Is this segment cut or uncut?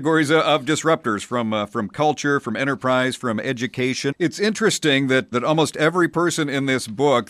cut